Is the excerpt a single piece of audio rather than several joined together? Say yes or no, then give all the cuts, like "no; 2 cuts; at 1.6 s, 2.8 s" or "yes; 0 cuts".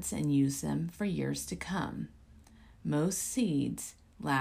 yes; 0 cuts